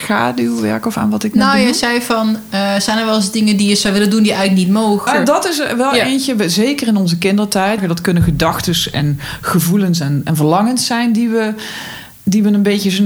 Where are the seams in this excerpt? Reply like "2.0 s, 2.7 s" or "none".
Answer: 5.1 s, 7.8 s